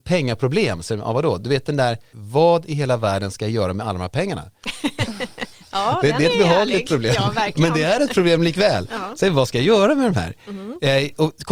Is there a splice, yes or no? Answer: yes